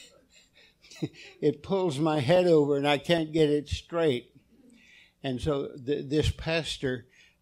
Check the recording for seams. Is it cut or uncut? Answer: uncut